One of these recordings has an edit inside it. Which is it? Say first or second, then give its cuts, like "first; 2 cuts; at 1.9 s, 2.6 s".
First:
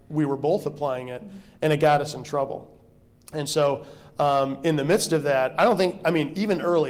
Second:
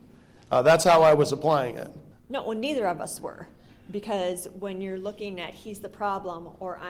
second; 1 cut; at 2.1 s